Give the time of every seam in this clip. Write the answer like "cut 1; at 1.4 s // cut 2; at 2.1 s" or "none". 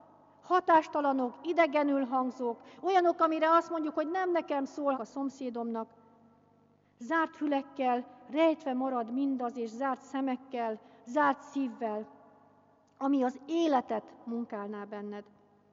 cut 1; at 4.9 s

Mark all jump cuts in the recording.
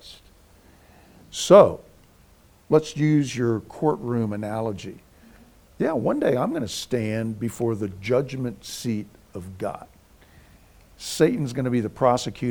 none

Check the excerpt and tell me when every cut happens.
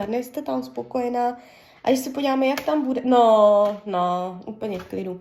none

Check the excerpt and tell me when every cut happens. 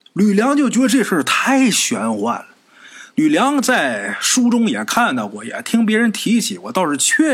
cut 1; at 3.1 s

